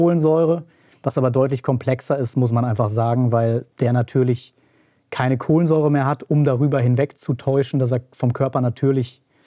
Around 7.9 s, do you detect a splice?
no; 1 cut; at 3.7 s

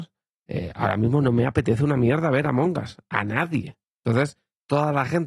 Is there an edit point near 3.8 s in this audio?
yes; 1 cut; at 3.8 s

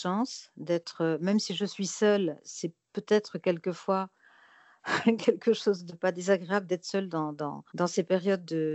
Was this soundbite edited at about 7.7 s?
yes; 1 cut; at 7.7 s

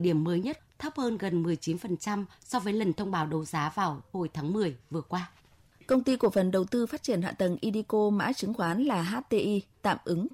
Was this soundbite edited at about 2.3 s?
no; 0 cuts

